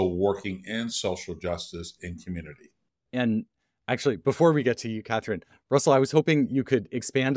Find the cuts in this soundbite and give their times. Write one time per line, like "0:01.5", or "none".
0:03.1